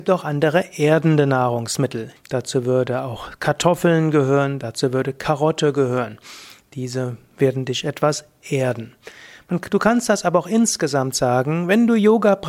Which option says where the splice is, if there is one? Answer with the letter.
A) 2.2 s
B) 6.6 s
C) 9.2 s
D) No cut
A